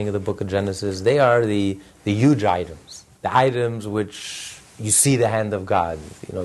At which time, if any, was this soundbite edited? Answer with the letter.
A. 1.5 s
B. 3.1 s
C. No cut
B